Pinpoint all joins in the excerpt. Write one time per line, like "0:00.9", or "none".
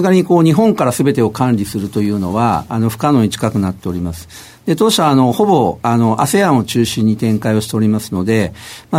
none

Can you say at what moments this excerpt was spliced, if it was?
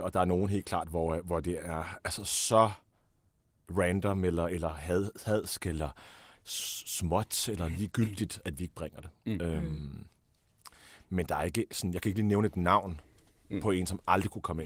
0:08.4

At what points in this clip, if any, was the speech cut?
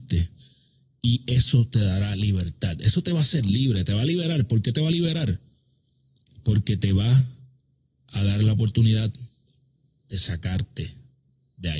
none

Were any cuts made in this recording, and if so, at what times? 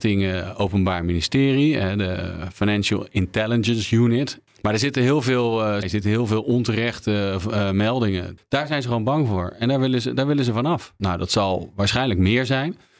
0:05.8
0:08.4
0:11.0

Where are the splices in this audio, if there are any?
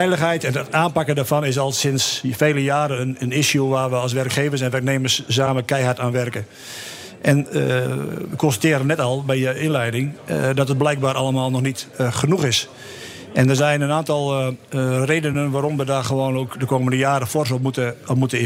none

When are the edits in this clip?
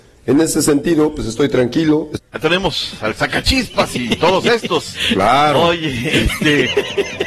0:02.3

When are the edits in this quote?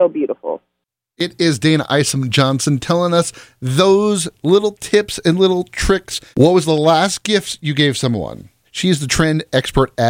0:06.3
0:08.6

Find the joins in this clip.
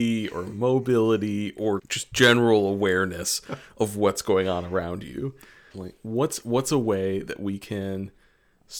0:01.8
0:05.7

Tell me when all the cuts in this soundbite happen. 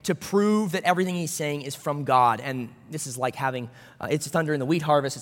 none

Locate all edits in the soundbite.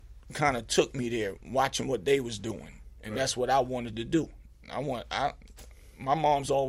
none

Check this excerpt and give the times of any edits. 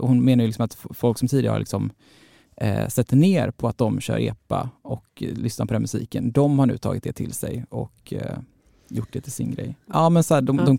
0:09.9

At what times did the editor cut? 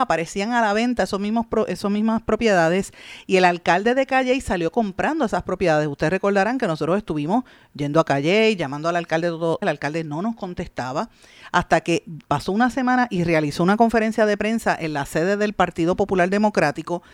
0:09.6

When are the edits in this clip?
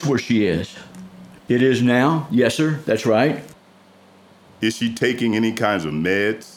0:01.5
0:04.4

